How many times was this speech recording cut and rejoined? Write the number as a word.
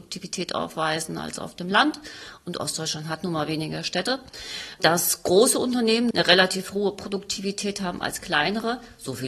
one